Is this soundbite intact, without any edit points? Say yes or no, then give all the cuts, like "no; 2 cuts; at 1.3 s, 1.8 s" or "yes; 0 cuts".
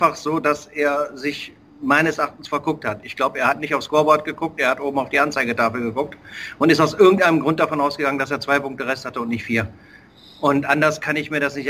yes; 0 cuts